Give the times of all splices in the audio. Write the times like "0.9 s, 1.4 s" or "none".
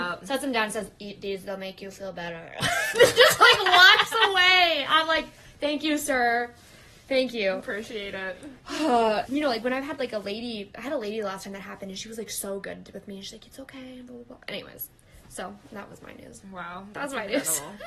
9.3 s

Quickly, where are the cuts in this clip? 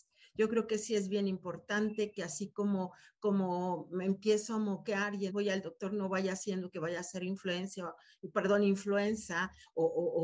5.3 s

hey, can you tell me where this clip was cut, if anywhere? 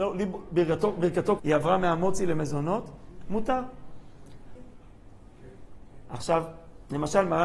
1.4 s, 4.6 s, 6.1 s

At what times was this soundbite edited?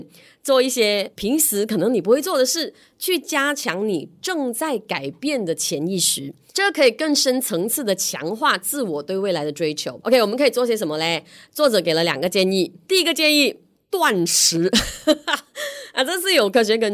none

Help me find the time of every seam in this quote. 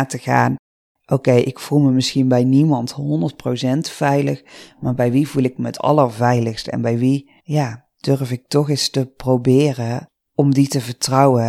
7.4 s

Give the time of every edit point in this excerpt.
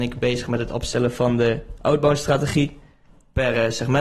none

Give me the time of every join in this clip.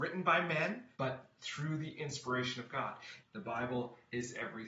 0.9 s, 3.2 s

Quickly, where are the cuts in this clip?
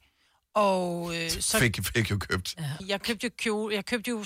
2.8 s

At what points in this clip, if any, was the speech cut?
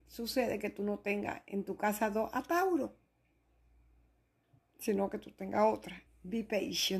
6.1 s

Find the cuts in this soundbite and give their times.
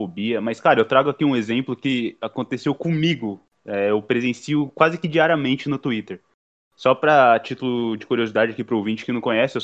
none

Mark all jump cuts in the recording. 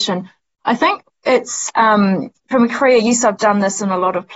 none

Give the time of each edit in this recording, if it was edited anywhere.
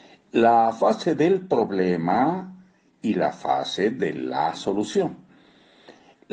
none

